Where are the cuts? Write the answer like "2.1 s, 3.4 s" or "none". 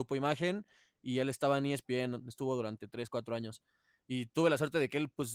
none